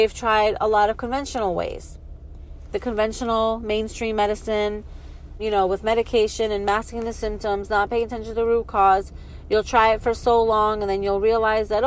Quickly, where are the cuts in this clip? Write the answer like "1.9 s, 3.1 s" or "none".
5.4 s